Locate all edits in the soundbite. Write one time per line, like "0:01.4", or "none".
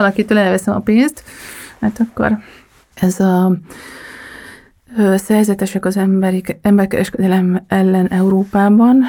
0:02.9